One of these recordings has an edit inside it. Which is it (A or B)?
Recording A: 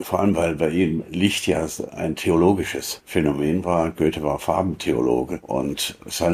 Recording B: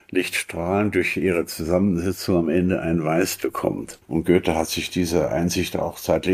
B